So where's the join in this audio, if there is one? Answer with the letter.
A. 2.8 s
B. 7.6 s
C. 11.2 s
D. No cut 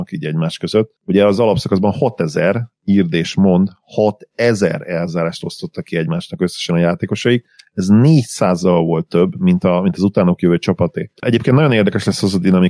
C